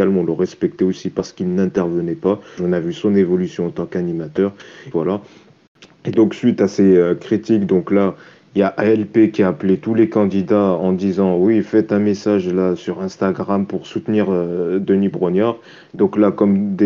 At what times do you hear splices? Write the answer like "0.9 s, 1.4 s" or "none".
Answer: 2.6 s, 4.9 s